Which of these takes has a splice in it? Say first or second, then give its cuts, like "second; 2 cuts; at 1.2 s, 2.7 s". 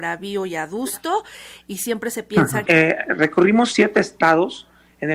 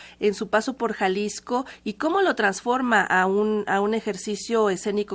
first; 1 cut; at 2.7 s